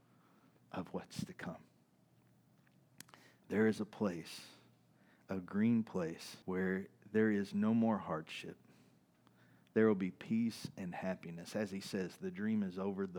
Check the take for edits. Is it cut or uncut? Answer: cut